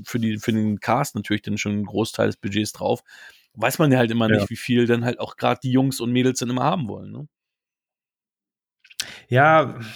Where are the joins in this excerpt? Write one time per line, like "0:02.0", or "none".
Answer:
none